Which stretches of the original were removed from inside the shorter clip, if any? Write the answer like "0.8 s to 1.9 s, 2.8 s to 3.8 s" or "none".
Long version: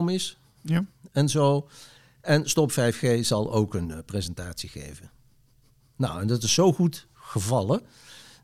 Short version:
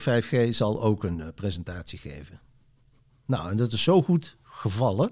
none